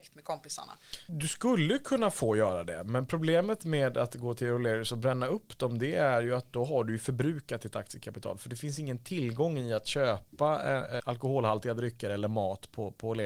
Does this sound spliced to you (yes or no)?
yes